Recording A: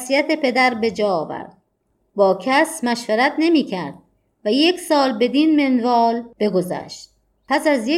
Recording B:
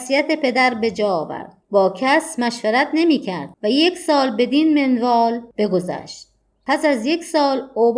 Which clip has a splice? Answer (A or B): B